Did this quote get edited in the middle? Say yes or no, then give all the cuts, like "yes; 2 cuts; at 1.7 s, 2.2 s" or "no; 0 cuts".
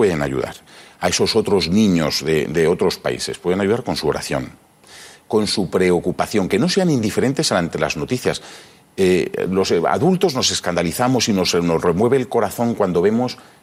no; 0 cuts